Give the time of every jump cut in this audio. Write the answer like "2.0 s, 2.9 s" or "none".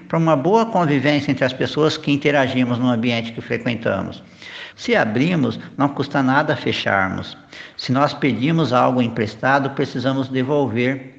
4.7 s